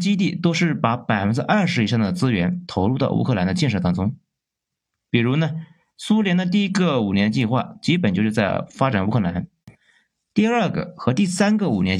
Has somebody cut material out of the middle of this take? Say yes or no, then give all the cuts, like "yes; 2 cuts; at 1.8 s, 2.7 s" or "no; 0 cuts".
no; 0 cuts